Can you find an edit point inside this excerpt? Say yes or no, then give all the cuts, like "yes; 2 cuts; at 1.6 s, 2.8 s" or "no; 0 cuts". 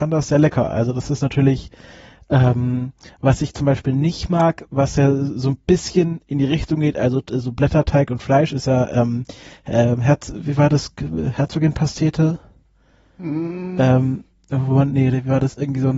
no; 0 cuts